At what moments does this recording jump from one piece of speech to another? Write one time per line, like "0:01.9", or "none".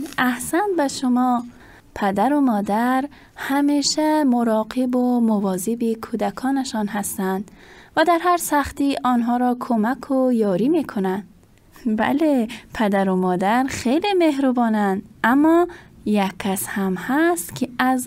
0:11.7